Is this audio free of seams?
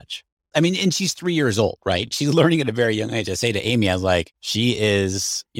yes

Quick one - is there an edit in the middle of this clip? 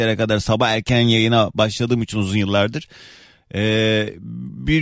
no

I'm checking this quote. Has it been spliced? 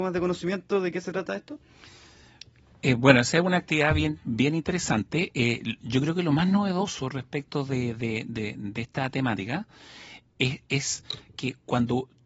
no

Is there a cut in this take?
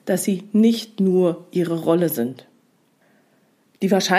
no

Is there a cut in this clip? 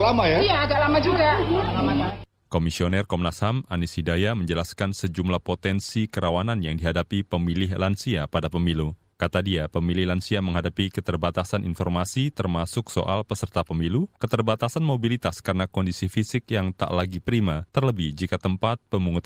no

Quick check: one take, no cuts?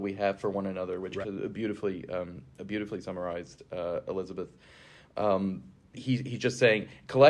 no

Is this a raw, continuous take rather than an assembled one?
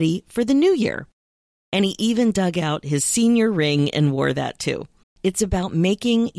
no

